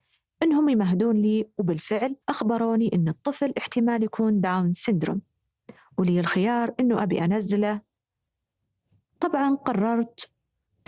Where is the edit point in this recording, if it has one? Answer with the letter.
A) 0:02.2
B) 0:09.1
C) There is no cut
A